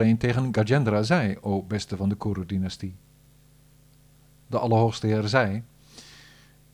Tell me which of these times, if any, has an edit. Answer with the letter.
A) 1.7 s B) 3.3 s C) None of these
C